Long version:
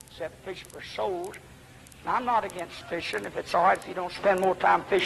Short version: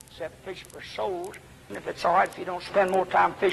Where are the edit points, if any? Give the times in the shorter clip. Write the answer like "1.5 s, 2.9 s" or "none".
1.7 s